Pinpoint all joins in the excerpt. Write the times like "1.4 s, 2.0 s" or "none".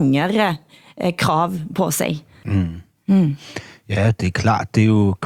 2.4 s